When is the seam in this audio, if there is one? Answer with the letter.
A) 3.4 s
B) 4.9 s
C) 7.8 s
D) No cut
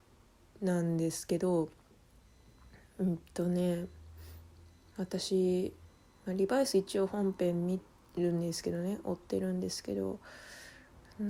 C